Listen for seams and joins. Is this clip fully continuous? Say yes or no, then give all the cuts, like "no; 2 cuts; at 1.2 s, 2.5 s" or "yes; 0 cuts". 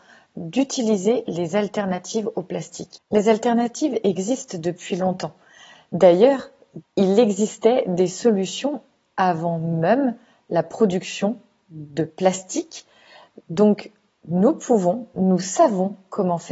no; 1 cut; at 6.8 s